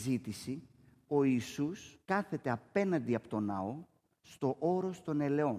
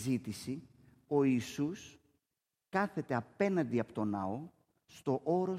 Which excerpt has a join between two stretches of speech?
first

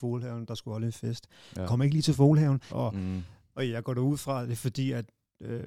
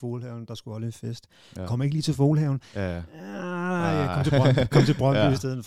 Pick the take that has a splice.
first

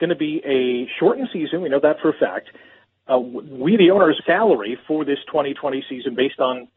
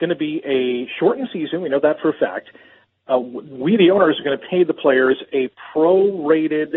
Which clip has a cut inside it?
first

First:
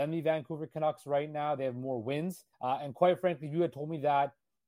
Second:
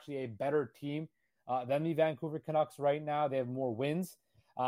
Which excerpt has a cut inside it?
first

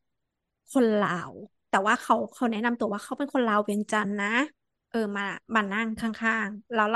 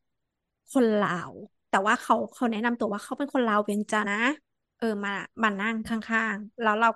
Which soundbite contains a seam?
second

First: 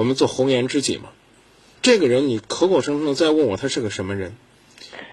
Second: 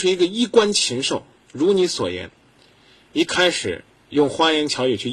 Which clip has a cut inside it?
first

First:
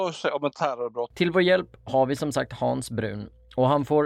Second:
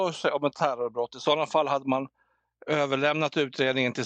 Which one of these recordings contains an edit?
first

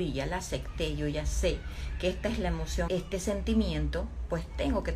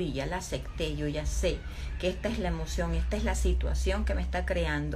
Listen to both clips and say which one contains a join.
first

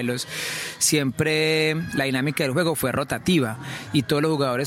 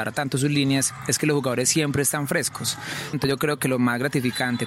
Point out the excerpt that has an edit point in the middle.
second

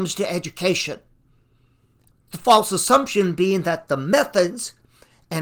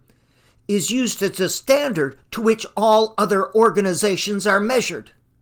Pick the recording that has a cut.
first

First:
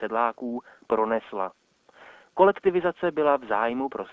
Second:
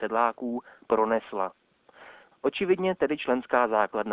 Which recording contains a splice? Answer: second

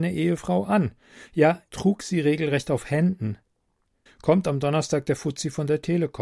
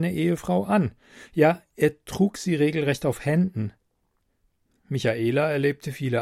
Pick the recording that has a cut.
first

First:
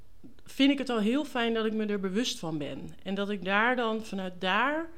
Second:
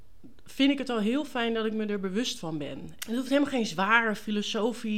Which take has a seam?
second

